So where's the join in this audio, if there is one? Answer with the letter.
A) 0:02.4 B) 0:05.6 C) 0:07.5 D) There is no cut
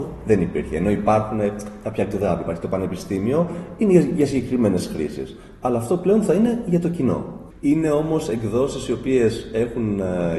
C